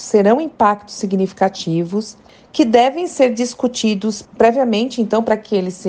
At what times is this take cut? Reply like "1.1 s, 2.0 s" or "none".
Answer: none